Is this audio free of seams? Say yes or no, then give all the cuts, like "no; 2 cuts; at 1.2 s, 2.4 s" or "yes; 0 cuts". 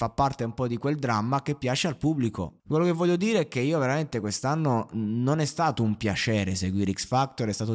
no; 1 cut; at 2.6 s